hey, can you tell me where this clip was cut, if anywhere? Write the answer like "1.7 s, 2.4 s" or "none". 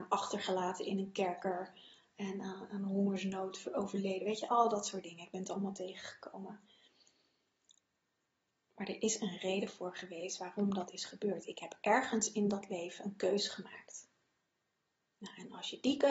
none